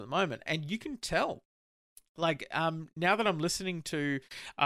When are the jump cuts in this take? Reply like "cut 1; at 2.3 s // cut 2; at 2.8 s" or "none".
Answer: none